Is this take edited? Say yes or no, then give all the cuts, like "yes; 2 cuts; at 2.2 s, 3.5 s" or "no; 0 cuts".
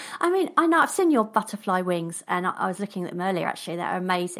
no; 0 cuts